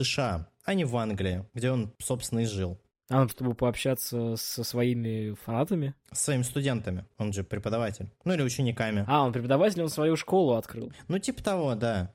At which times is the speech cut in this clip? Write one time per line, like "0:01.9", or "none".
0:03.3

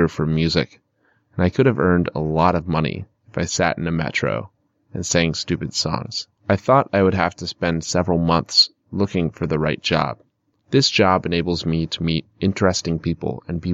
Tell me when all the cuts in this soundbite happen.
0:06.4
0:10.6

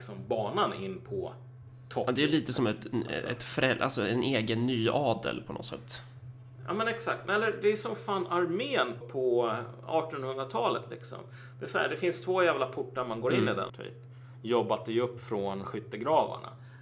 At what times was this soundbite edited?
0:09.0
0:13.7

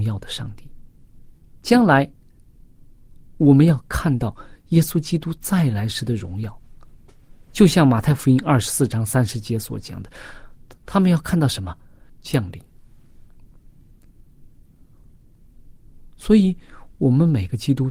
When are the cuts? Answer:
0:12.1

